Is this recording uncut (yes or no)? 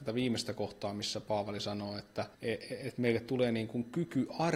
no